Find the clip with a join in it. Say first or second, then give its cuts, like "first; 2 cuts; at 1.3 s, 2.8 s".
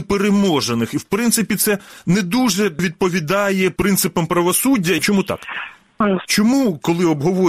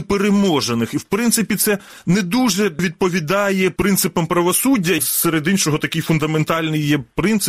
first; 2 cuts; at 5.0 s, 6.3 s